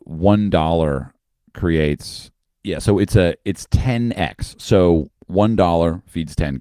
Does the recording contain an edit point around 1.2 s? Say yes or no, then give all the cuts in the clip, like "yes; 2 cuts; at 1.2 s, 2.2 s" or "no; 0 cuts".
no; 1 cut; at 2.6 s